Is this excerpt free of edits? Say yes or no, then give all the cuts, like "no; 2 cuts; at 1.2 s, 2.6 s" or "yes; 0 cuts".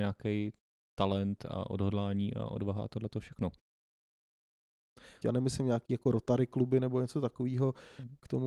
no; 1 cut; at 5.2 s